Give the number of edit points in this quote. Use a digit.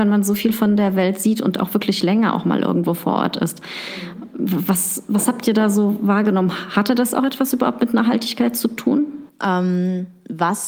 0